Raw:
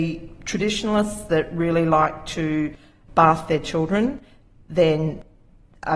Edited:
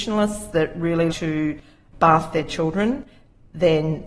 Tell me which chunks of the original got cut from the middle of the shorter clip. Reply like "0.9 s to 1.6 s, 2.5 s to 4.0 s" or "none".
1.9 s to 2.2 s